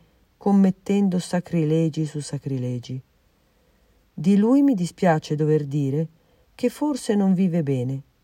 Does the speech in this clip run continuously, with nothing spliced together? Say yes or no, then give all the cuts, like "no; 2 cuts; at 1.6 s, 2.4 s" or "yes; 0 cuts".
yes; 0 cuts